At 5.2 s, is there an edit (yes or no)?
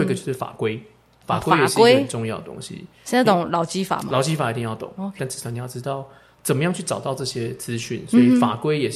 yes